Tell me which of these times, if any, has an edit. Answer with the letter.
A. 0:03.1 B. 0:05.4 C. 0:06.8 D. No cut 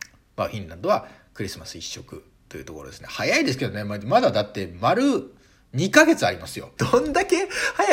C